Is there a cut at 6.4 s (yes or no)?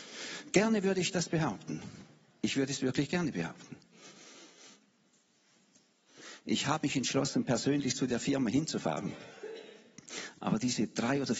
no